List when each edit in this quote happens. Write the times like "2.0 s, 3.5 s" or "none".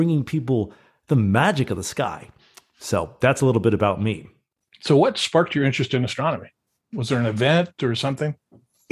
none